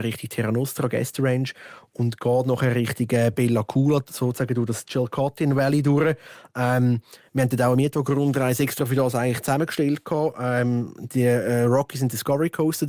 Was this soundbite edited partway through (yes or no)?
no